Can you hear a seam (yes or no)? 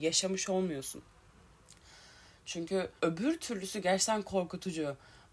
yes